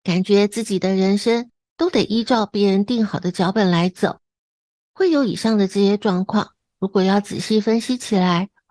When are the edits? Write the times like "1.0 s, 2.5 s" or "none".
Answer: none